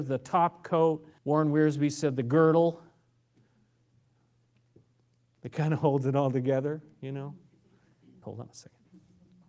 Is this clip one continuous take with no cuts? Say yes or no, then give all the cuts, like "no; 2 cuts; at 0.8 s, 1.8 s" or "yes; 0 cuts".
no; 2 cuts; at 1.2 s, 8.2 s